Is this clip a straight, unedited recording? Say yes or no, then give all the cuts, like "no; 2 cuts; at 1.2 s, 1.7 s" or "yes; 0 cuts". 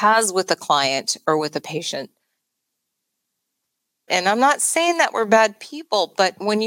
no; 1 cut; at 4.1 s